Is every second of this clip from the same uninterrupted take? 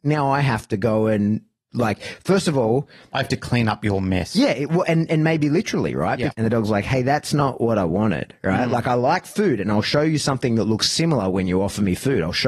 no; 1 cut; at 6.3 s

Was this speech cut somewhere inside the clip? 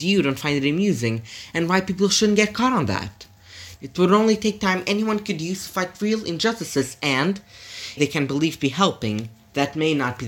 yes; 2 cuts; at 3.8 s, 8.0 s

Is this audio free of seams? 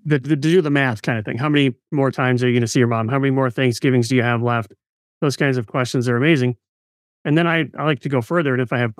yes; 0 cuts

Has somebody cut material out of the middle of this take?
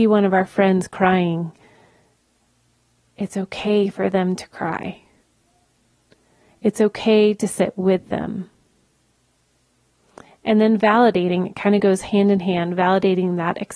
no; 0 cuts

